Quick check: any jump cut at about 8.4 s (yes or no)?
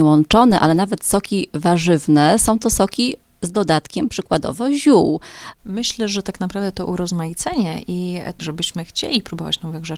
yes